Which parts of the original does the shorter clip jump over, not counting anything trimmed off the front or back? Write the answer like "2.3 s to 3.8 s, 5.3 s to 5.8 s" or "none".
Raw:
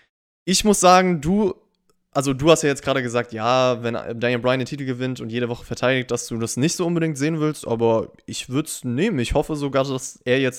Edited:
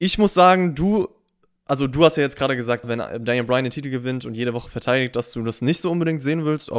3.3 s to 3.8 s